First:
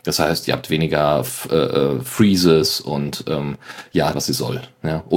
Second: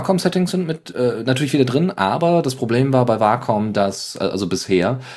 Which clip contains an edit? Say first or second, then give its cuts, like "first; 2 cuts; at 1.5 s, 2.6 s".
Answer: first; 1 cut; at 4.1 s